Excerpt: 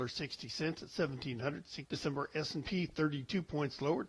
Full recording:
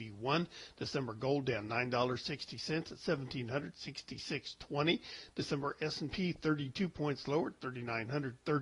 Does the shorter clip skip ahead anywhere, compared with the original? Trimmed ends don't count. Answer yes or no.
yes